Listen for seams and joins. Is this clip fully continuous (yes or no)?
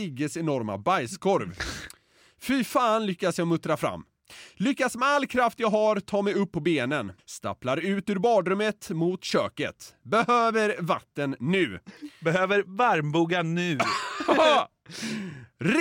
no